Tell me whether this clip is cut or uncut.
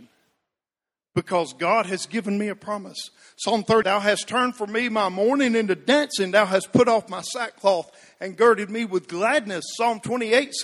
cut